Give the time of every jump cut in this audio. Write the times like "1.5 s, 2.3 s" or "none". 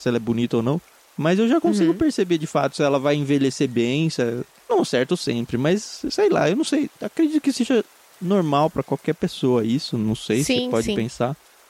none